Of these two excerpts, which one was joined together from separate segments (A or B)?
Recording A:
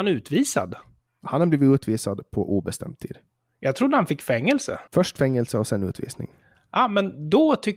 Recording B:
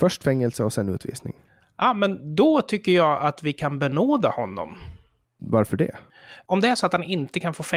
A